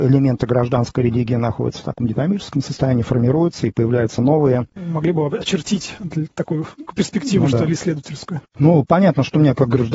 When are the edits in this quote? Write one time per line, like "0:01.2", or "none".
0:04.7
0:08.5